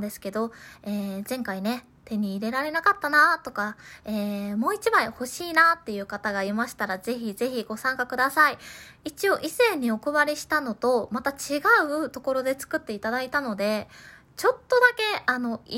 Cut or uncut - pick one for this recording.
uncut